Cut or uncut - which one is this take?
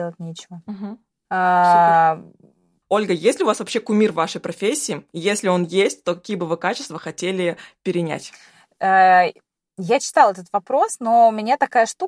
cut